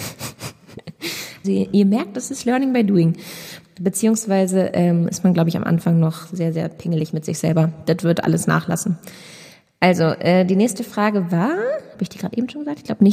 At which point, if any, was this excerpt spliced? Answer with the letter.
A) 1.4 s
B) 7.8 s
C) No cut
A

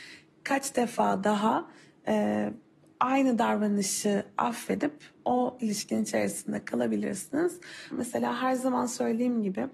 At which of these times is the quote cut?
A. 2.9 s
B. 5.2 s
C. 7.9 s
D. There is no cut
C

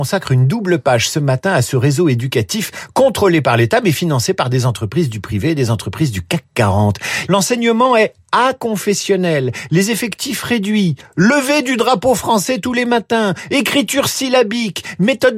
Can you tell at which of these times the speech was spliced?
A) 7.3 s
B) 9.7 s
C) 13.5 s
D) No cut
A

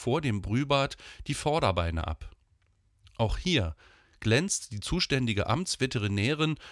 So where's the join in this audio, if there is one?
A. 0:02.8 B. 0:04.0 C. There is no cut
C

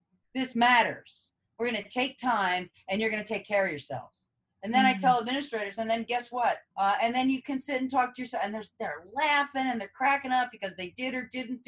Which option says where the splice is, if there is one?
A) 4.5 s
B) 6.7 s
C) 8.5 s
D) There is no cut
B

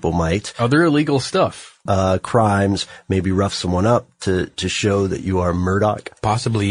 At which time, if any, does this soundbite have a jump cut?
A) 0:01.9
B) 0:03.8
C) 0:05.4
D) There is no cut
A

